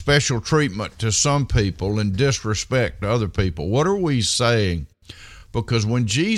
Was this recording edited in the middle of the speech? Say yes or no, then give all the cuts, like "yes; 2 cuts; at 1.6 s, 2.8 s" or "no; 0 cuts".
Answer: no; 0 cuts